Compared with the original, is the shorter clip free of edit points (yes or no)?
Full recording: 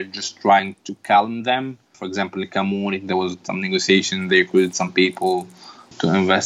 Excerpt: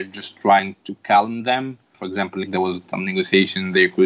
no